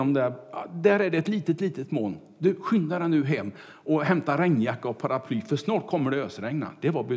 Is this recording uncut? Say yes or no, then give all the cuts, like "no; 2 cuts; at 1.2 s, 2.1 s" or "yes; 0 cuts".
yes; 0 cuts